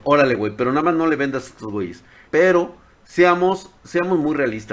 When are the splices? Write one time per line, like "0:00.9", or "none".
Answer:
0:02.3